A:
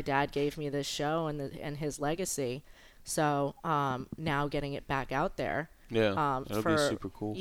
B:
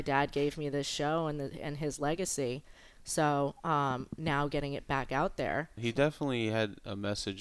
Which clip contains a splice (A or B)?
B